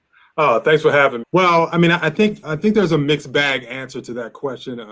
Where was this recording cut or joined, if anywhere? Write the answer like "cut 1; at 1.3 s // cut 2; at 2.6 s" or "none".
cut 1; at 1.2 s // cut 2; at 2.4 s